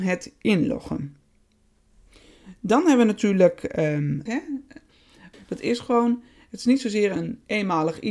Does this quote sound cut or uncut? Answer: cut